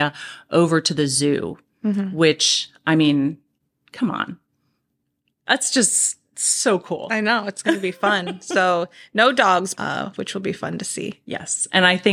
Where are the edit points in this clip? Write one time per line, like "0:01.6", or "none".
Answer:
0:09.7